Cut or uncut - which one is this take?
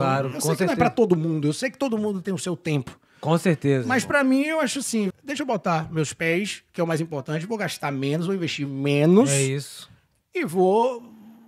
cut